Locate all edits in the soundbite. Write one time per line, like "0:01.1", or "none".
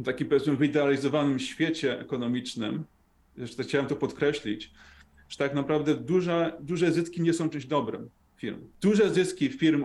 none